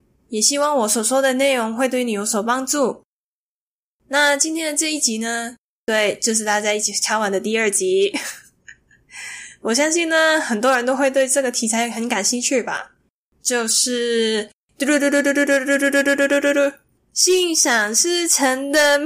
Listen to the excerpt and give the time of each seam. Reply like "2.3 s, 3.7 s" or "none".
16.2 s